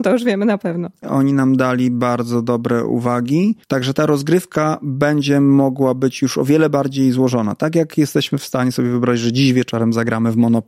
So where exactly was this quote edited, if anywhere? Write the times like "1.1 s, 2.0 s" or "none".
1.0 s, 3.6 s

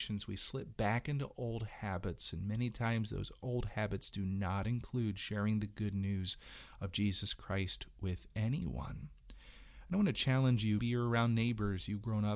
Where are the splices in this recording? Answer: 10.8 s

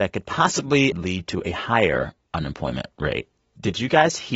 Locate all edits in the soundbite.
0.9 s

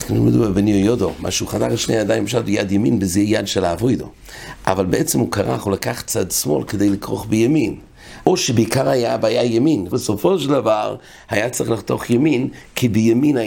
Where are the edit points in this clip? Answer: 8.2 s, 9.9 s

